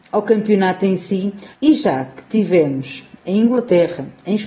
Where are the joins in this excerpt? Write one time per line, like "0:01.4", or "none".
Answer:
0:01.5